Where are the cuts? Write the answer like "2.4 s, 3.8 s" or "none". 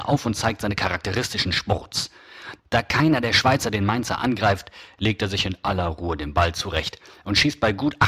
2.6 s